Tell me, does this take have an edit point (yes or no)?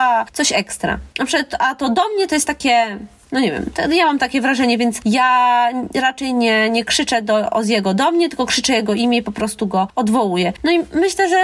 no